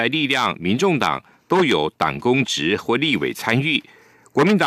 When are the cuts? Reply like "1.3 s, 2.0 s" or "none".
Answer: none